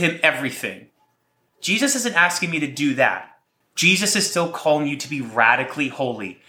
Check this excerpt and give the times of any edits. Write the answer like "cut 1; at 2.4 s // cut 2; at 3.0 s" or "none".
cut 1; at 1.5 s // cut 2; at 3.6 s